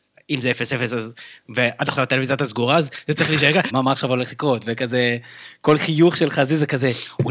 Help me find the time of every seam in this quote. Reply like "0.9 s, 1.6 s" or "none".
3.7 s